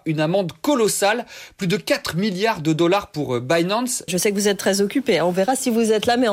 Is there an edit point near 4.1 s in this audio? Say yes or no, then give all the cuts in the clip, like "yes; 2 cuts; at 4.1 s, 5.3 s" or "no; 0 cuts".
yes; 1 cut; at 4.1 s